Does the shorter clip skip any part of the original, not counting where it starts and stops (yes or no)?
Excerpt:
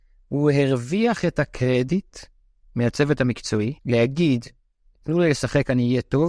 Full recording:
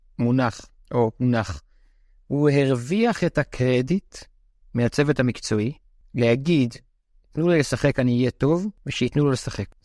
yes